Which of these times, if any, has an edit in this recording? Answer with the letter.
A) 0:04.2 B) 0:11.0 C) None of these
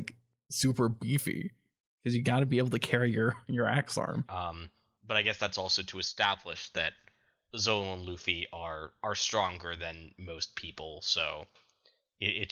A